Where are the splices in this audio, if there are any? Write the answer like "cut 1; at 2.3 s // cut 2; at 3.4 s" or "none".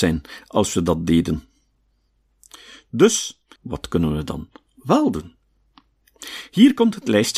cut 1; at 3.6 s